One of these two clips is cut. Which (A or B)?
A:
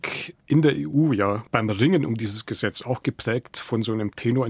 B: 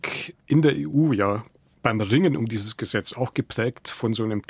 A